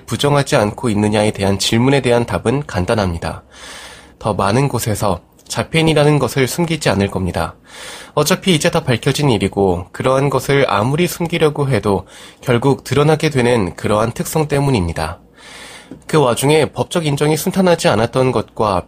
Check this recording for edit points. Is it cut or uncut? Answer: cut